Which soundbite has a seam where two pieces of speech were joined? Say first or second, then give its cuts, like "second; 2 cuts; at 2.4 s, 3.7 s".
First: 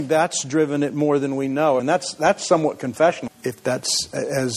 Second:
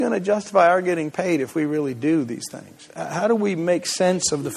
first; 2 cuts; at 1.8 s, 3.3 s